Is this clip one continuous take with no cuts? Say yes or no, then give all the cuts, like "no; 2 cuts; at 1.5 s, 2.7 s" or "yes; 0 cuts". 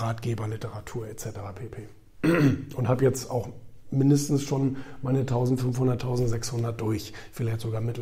yes; 0 cuts